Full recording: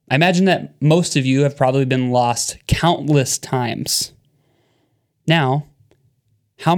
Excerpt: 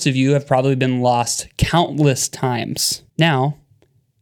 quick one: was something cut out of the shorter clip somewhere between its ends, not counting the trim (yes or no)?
yes